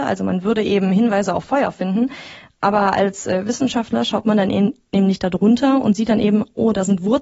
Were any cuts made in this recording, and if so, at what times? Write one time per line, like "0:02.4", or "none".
none